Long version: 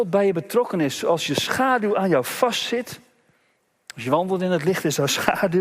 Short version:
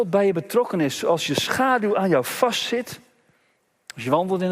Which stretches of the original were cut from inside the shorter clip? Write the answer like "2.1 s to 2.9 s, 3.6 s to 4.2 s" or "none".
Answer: none